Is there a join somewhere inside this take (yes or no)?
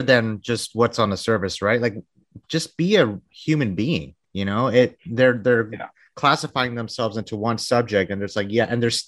no